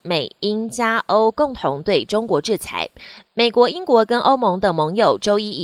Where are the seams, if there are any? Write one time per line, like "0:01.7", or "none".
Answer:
none